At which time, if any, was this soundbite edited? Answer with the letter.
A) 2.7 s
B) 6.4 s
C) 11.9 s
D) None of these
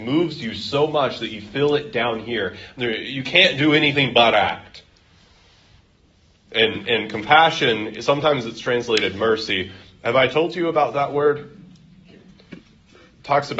B